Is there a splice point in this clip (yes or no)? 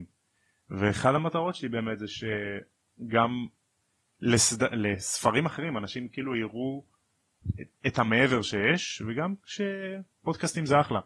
no